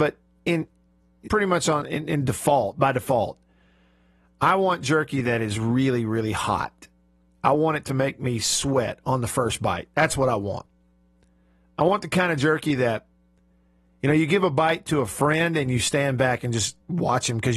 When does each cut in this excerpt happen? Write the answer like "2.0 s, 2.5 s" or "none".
1.3 s